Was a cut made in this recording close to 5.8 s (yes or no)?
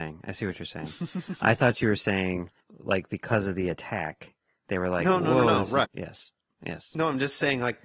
yes